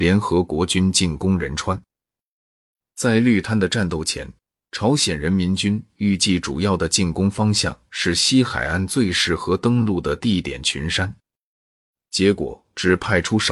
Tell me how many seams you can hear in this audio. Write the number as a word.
zero